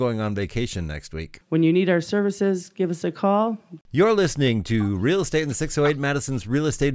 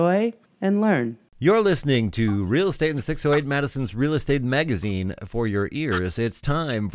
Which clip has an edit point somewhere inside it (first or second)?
first